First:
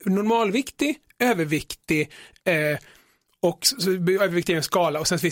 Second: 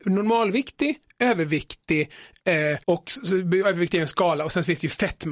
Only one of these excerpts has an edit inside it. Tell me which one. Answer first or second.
second